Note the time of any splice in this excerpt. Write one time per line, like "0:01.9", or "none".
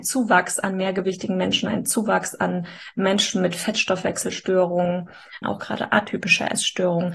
0:05.4